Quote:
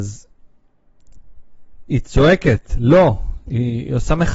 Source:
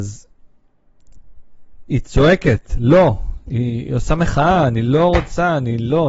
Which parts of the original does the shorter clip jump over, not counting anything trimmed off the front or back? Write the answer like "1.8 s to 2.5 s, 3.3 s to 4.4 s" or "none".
none